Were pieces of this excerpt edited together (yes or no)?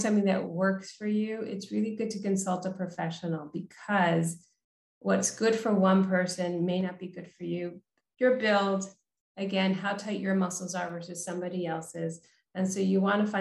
no